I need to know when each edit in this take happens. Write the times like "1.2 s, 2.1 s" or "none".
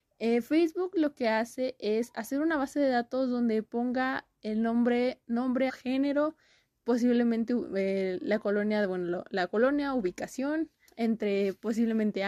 5.7 s, 10.9 s